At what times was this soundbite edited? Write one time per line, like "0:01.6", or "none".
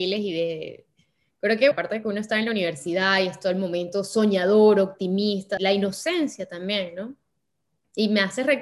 0:01.7
0:05.6